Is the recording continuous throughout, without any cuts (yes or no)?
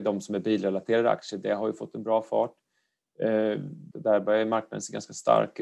no